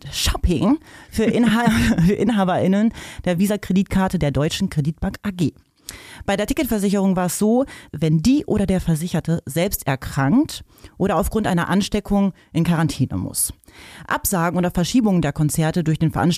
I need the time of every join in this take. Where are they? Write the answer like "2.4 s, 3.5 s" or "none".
7.9 s